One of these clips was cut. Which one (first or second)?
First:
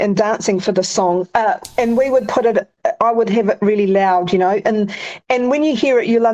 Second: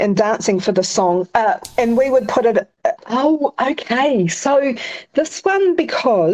second